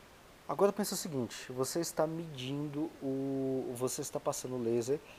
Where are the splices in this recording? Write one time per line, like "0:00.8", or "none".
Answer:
none